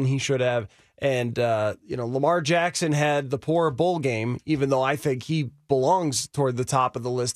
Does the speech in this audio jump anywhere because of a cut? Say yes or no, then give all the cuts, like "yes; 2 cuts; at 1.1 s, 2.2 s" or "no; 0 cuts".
no; 0 cuts